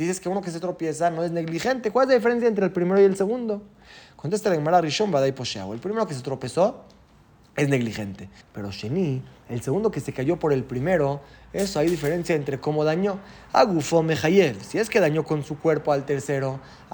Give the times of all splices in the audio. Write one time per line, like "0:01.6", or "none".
0:08.4